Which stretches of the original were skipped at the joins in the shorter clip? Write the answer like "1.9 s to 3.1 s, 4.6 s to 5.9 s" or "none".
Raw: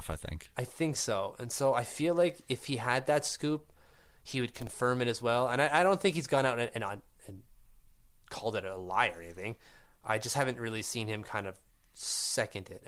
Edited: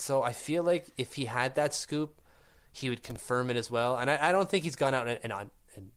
none